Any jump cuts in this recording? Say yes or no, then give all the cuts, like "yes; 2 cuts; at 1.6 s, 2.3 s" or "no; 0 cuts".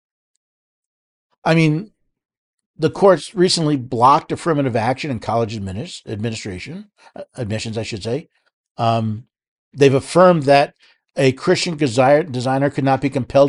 no; 0 cuts